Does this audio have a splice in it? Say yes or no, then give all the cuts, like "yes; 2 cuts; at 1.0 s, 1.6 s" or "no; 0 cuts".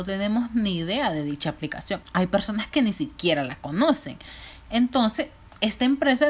yes; 1 cut; at 2.0 s